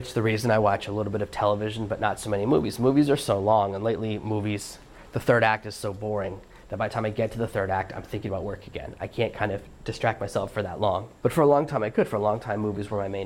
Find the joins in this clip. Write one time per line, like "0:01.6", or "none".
none